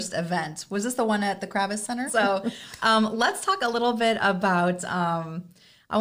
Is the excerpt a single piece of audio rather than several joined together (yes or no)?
no